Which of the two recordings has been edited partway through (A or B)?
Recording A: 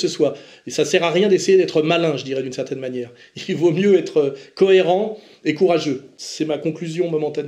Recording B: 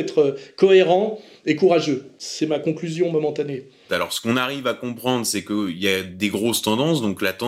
B